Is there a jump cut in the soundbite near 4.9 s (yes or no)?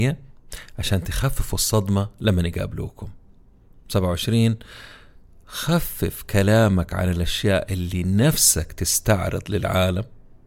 no